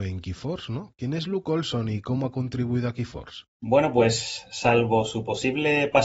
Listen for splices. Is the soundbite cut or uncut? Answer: uncut